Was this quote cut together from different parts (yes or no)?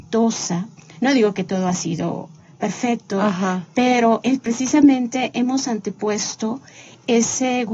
no